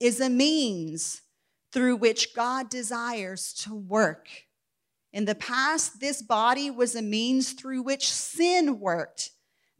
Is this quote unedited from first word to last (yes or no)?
yes